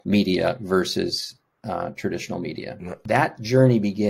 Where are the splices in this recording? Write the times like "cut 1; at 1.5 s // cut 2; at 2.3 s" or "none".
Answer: cut 1; at 3.0 s